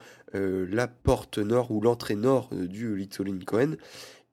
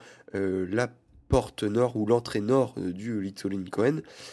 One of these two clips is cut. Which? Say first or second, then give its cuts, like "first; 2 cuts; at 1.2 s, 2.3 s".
first; 1 cut; at 1.0 s